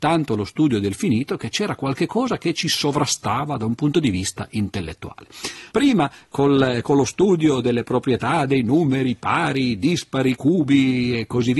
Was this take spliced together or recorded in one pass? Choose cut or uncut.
cut